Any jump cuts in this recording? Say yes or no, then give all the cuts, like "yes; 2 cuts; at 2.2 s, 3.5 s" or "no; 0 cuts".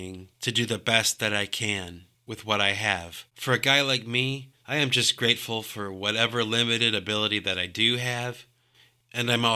yes; 2 cuts; at 3.3 s, 4.6 s